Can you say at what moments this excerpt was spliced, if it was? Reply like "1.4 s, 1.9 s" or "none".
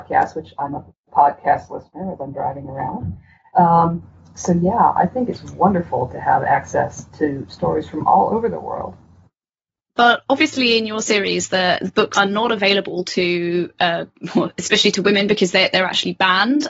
12.1 s